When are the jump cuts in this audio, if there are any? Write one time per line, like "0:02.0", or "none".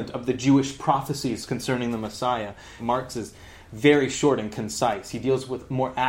0:02.8